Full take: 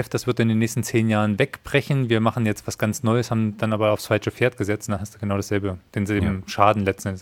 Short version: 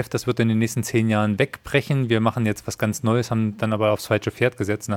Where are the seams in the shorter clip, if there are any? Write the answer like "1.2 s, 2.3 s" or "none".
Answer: none